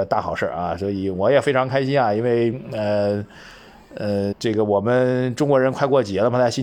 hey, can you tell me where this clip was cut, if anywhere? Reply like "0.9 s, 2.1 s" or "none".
4.3 s